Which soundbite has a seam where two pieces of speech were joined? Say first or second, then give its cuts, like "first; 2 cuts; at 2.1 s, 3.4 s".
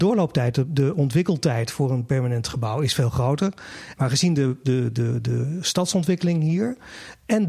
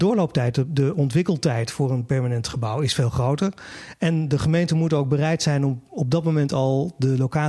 first; 1 cut; at 3.9 s